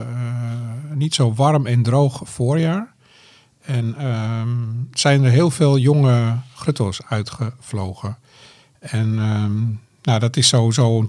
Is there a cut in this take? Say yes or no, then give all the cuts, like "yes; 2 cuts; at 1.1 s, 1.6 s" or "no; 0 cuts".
no; 0 cuts